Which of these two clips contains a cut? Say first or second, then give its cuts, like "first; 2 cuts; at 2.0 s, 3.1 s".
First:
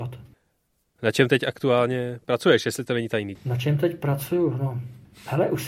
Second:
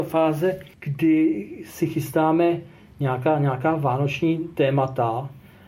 first; 1 cut; at 3.4 s